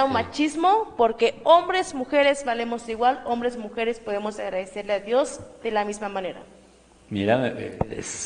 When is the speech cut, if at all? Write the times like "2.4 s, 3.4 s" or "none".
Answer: none